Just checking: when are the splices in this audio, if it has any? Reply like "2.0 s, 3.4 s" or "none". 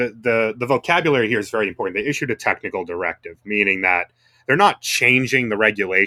none